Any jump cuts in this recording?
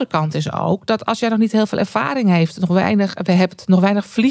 no; 0 cuts

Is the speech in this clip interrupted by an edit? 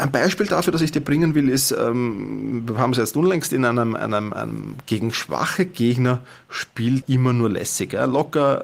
yes; 2 cuts; at 4.8 s, 7.0 s

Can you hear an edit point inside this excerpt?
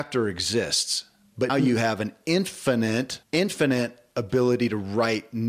yes; 2 cuts; at 1.5 s, 3.2 s

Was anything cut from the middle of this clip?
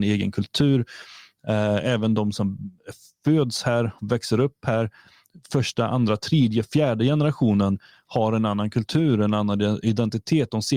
no; 0 cuts

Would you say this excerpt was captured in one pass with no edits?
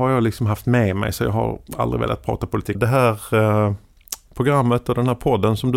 no; 1 cut; at 2.7 s

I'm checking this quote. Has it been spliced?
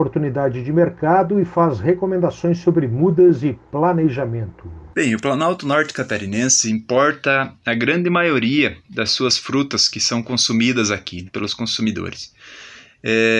yes; 2 cuts; at 4.9 s, 11.3 s

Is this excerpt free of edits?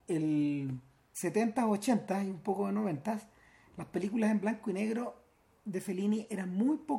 no; 1 cut; at 1.1 s

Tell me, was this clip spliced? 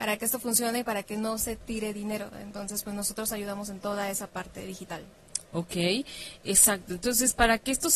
no; 0 cuts

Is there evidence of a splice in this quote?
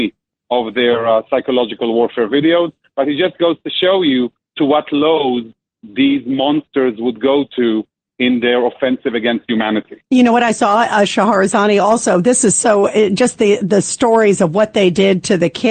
no; 0 cuts

